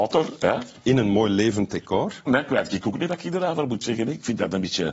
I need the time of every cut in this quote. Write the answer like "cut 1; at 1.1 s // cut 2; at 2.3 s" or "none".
cut 1; at 2.3 s

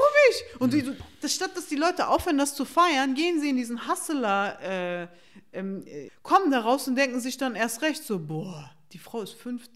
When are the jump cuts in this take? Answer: cut 1; at 6.1 s

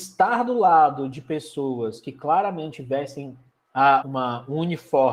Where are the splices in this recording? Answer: cut 1; at 4.0 s

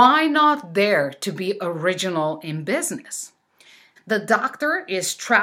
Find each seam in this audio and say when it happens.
cut 1; at 4.0 s

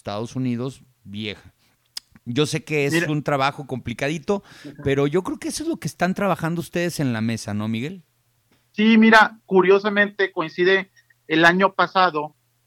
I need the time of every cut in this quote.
none

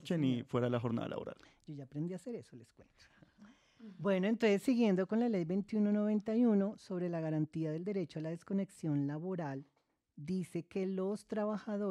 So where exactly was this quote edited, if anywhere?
none

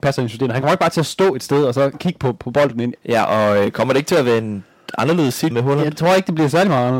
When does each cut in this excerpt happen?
cut 1; at 2.9 s // cut 2; at 5.5 s

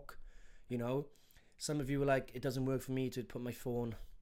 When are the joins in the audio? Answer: none

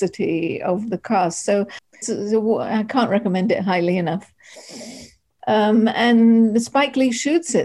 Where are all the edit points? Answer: cut 1; at 2.0 s // cut 2; at 5.4 s

